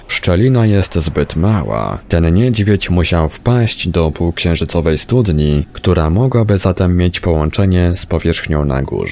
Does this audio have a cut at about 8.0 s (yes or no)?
no